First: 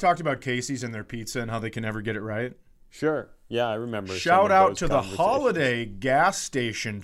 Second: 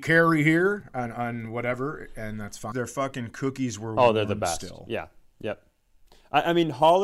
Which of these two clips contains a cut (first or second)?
second